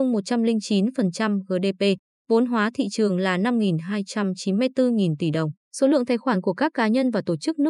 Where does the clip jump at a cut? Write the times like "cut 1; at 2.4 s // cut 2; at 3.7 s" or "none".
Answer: cut 1; at 2.2 s // cut 2; at 5.6 s